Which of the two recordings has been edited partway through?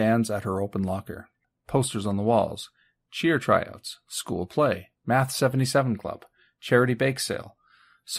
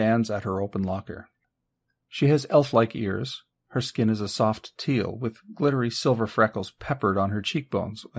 first; 1 cut; at 1.6 s

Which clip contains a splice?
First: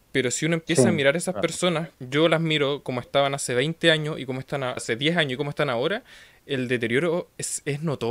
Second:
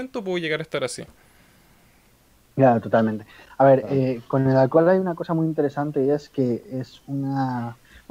first; 2 cuts; at 1.9 s, 4.8 s

